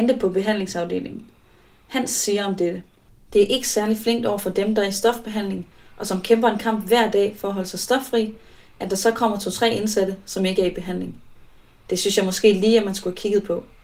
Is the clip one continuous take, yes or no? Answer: yes